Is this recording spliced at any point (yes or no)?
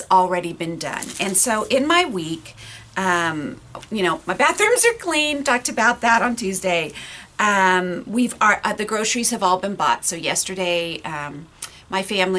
no